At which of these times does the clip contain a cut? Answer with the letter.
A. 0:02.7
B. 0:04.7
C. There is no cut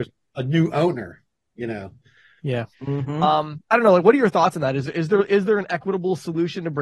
A